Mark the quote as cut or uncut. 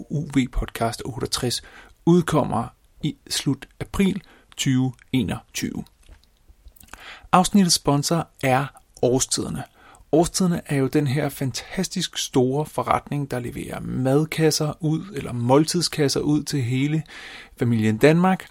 uncut